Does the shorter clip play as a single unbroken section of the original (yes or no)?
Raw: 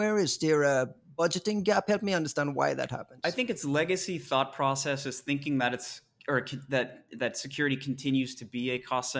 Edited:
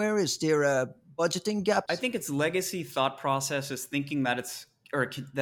no